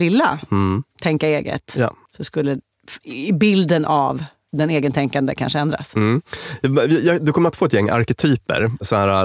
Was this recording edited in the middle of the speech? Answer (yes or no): no